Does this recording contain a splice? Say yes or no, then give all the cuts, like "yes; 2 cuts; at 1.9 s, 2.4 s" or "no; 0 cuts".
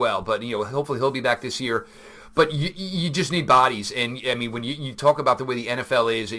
no; 0 cuts